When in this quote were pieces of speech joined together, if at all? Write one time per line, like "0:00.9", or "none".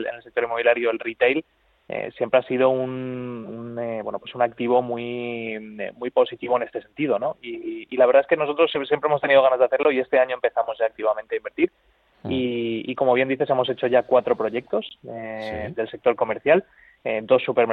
none